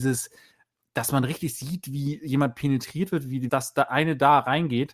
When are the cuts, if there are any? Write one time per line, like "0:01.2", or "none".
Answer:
0:03.5